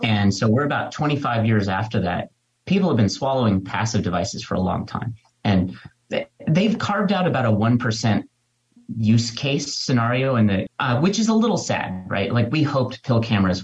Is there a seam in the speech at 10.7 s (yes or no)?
yes